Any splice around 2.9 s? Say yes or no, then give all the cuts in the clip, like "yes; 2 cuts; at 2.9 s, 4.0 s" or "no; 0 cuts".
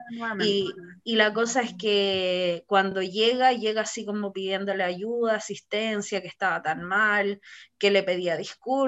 no; 0 cuts